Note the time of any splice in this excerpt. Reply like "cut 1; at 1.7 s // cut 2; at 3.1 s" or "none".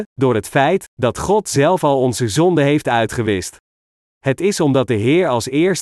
cut 1; at 4.1 s

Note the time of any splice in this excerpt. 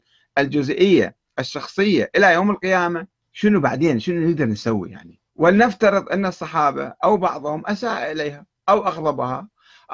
cut 1; at 3.2 s // cut 2; at 5.3 s

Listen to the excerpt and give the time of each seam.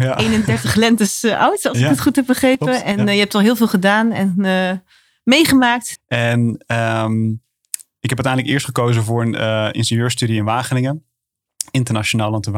cut 1; at 6.0 s

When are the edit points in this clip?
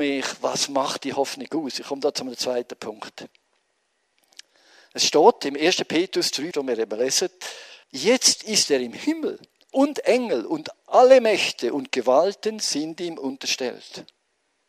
cut 1; at 6.5 s // cut 2; at 7.8 s

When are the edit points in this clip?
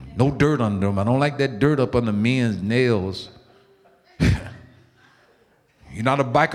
none

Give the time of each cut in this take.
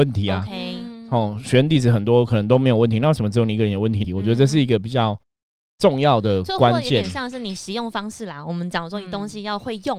cut 1; at 4.0 s

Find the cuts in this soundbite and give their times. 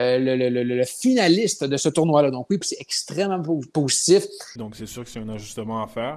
cut 1; at 2.6 s // cut 2; at 4.6 s

